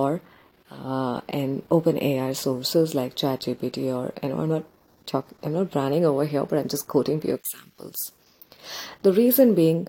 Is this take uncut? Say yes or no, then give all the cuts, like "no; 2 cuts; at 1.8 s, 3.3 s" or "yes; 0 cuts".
yes; 0 cuts